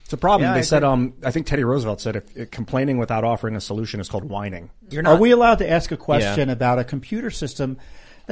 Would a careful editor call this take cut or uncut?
cut